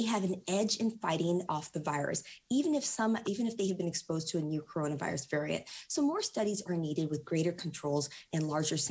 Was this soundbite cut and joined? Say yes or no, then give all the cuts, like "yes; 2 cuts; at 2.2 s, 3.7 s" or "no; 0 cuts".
yes; 1 cut; at 3.2 s